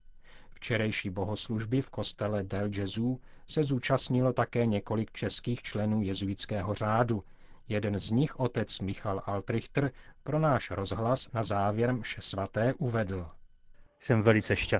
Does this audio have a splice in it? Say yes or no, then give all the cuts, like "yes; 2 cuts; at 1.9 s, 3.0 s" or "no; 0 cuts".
no; 0 cuts